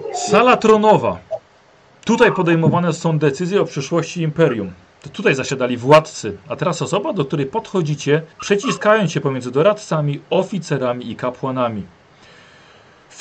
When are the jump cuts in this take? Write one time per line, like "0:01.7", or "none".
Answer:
0:08.3